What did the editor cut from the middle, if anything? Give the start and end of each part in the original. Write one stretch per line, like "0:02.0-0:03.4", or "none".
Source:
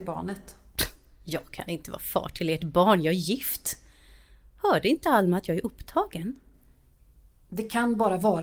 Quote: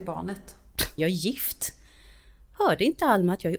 0:01.0-0:03.0